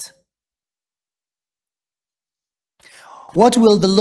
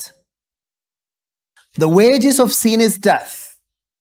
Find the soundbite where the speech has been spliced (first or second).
second